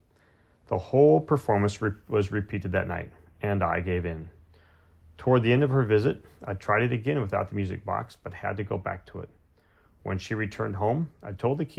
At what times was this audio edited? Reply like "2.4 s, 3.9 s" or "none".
none

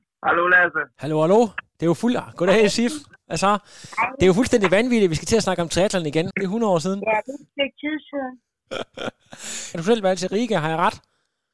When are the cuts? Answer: 6.3 s, 9.7 s

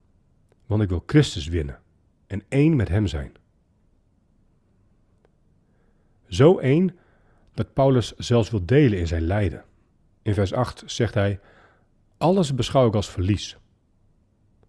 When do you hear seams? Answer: 10.1 s

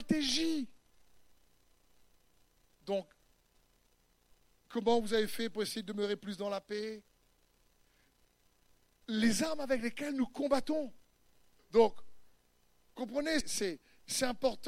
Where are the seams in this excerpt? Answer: 2.7 s, 11.6 s, 13.4 s

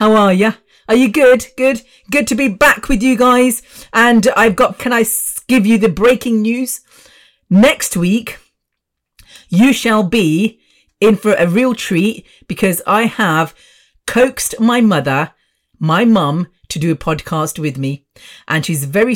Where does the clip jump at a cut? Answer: 4.8 s

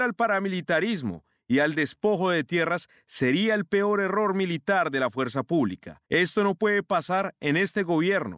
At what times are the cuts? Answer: 6.1 s

